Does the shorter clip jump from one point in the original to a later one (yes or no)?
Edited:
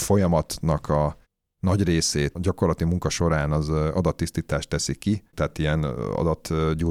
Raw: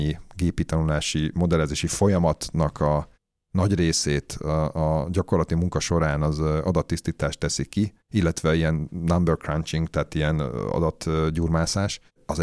yes